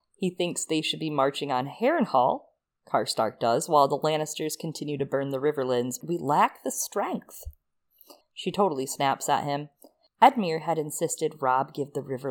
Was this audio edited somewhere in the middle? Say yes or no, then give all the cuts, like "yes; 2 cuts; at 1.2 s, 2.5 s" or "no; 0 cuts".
yes; 2 cuts; at 6.0 s, 8.2 s